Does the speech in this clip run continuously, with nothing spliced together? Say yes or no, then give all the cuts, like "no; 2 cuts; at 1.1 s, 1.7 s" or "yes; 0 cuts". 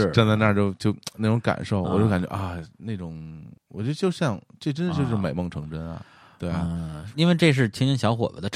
no; 2 cuts; at 3.6 s, 7.1 s